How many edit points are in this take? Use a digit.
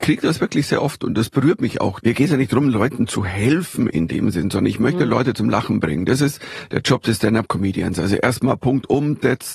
1